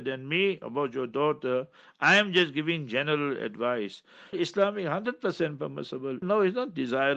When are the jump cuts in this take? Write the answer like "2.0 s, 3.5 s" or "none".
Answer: 4.3 s, 6.2 s